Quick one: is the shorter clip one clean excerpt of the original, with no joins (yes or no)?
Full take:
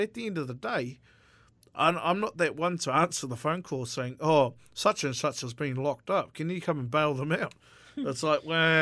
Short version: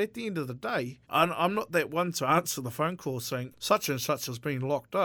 no